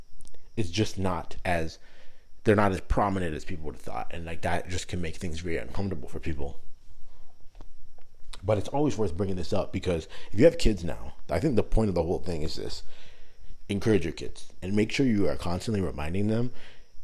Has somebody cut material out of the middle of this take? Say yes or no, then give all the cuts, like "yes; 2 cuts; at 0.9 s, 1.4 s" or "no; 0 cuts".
no; 0 cuts